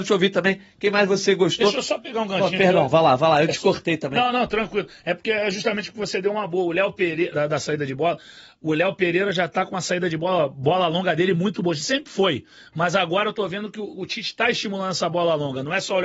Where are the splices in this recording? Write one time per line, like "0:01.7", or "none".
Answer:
0:07.3